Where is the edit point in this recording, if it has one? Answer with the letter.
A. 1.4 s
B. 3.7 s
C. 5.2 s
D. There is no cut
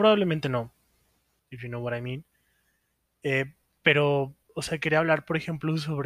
A